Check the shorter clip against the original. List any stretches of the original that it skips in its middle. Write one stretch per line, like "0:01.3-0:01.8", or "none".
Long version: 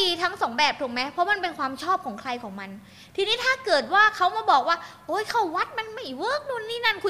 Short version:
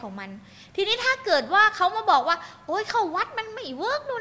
none

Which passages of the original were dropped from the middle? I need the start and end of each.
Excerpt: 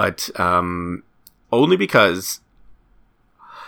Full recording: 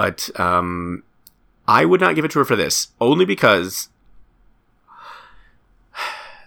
0:01.4-0:02.9

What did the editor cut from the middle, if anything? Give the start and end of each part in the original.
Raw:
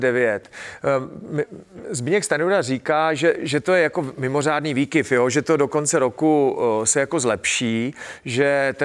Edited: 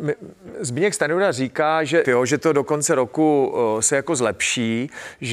0:03.3-0:05.1

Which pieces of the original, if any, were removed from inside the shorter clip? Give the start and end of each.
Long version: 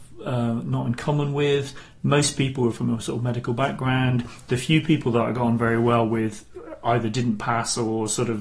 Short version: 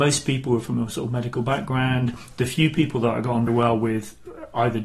0:05.6-0:05.8

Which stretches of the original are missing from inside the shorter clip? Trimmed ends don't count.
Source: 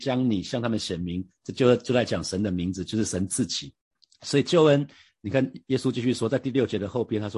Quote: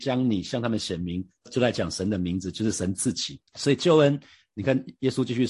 0:01.5-0:01.8
0:03.8-0:04.1

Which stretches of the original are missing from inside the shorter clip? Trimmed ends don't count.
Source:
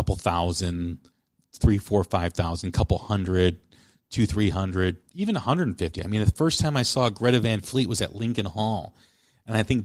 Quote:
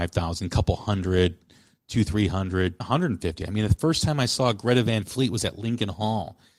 0:05.0-0:05.4

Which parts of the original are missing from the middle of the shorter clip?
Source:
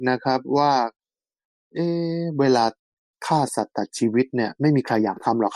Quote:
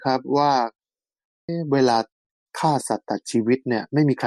0:01.7-0:02.2

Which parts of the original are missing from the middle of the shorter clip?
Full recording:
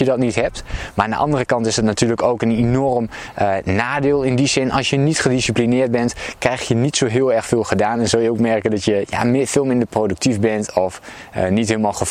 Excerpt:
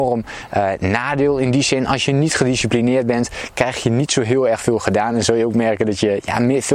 none

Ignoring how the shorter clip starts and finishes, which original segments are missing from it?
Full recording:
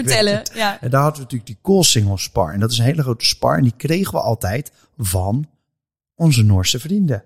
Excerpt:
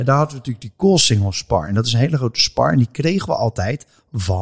none

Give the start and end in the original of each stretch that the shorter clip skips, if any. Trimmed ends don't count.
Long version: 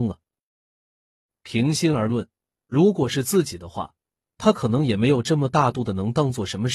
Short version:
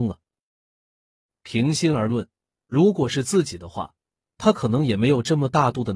none

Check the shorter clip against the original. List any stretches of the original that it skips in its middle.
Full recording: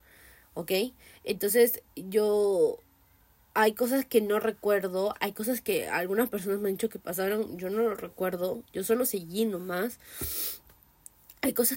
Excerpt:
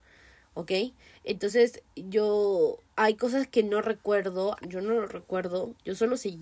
0:02.9-0:03.4
0:05.2-0:07.5

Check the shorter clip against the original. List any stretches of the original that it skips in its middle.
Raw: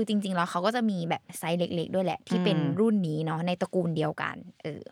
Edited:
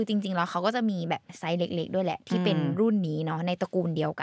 none

